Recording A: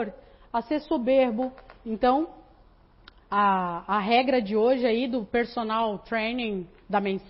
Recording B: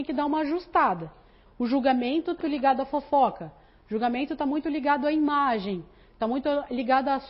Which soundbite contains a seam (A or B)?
B